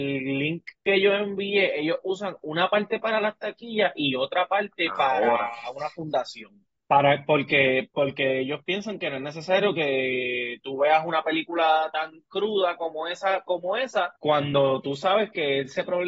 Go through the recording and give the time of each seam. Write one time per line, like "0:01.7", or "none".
0:06.8
0:14.2